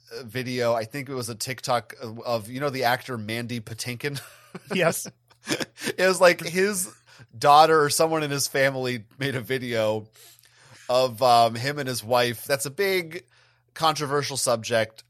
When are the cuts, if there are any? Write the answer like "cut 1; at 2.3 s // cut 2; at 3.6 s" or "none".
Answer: cut 1; at 12.5 s